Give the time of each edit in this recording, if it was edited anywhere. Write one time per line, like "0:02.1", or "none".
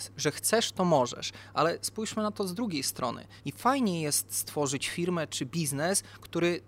0:03.4